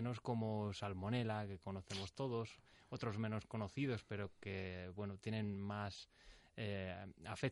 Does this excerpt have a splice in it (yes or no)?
no